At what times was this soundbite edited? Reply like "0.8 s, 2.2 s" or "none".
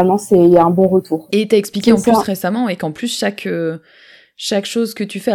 1.3 s

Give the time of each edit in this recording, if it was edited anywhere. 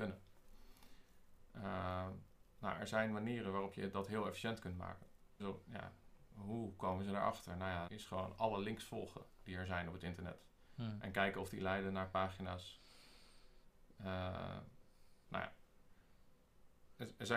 5.4 s, 7.9 s, 15.2 s

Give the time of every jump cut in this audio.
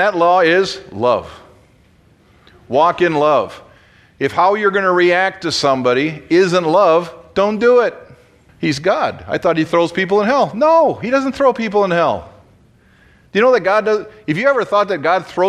8.5 s

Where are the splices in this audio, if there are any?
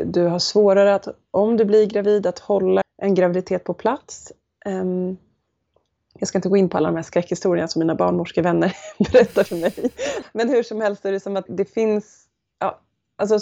2.8 s, 10.2 s, 11.5 s

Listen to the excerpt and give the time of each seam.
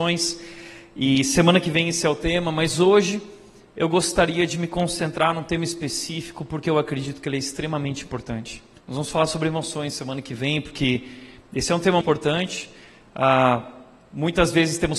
8.8 s, 12.0 s

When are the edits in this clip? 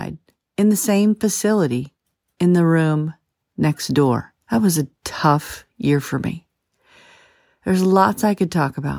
4.4 s

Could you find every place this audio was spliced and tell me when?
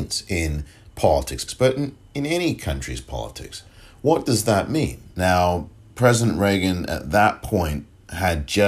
1.5 s, 5.1 s

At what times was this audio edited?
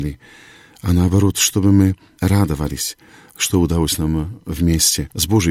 none

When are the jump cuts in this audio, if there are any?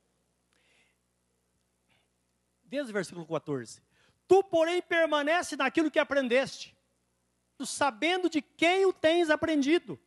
7.6 s

